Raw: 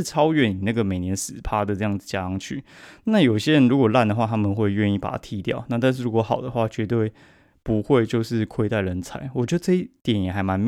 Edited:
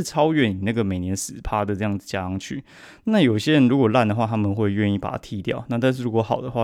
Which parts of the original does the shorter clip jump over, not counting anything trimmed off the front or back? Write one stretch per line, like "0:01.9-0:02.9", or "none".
none